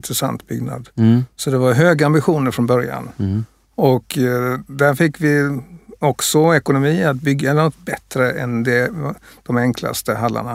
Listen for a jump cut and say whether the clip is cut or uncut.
uncut